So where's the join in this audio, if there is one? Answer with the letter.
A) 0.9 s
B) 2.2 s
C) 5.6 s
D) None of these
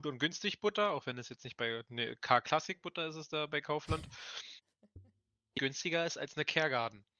C